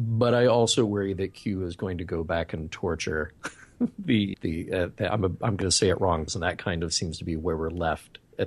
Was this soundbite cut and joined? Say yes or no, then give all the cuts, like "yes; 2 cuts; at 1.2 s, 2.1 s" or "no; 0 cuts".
yes; 2 cuts; at 4.3 s, 6.3 s